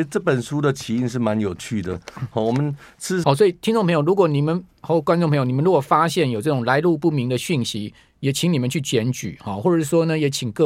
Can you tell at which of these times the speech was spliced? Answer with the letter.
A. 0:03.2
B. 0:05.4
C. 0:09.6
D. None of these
A